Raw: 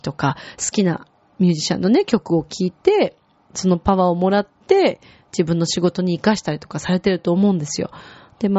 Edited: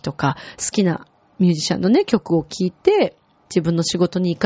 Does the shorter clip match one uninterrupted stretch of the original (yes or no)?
no